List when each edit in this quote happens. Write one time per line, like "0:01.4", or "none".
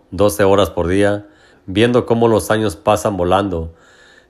0:01.5